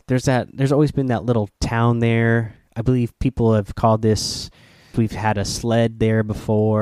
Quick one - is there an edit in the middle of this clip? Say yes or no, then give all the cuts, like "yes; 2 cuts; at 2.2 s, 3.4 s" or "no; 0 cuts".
yes; 1 cut; at 4.9 s